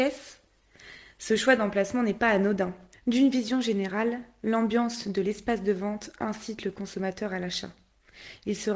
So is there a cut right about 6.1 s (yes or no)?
no